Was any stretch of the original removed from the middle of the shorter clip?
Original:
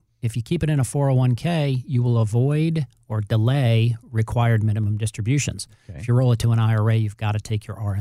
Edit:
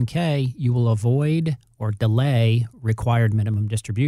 no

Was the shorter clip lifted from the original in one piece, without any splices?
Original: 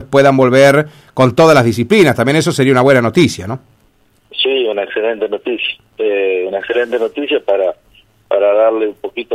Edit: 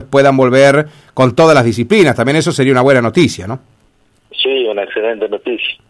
yes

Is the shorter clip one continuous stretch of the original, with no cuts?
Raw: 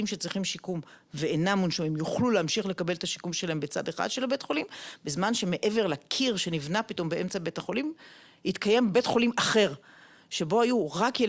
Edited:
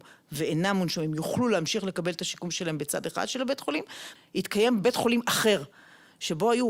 no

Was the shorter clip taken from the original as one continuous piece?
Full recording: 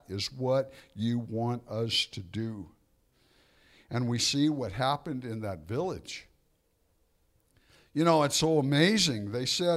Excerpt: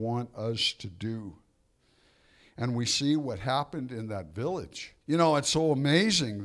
no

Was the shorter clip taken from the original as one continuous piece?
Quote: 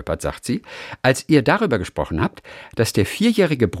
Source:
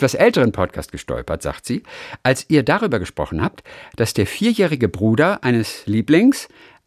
yes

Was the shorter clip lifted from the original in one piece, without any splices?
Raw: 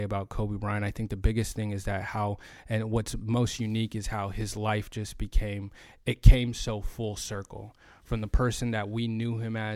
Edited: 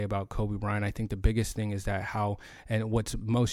yes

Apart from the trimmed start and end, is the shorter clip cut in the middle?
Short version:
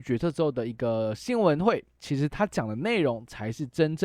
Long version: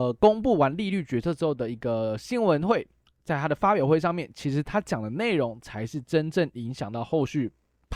yes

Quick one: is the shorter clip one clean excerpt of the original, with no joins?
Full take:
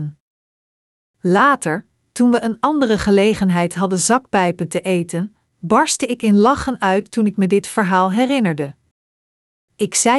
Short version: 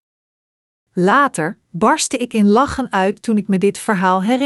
no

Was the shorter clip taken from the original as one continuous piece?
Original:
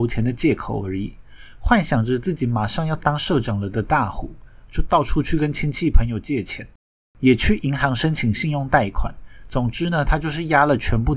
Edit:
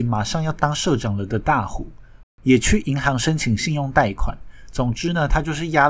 no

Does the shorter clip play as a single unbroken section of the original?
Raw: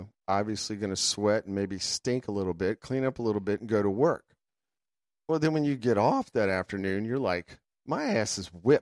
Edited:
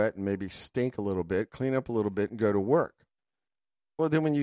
yes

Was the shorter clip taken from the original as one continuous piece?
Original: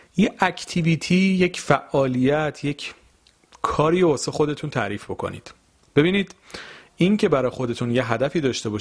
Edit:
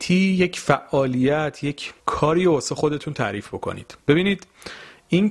no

